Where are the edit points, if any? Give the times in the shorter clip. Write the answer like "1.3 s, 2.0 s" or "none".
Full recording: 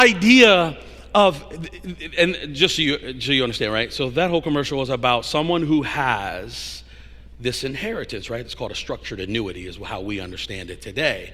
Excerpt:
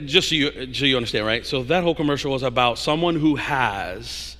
none